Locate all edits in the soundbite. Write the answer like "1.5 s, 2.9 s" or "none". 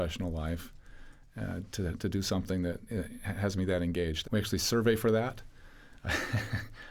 4.2 s, 6.0 s